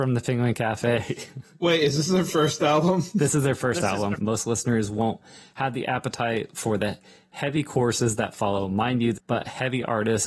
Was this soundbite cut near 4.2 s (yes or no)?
yes